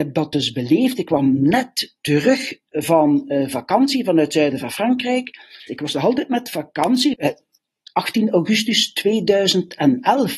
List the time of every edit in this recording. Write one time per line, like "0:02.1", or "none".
0:05.7
0:07.1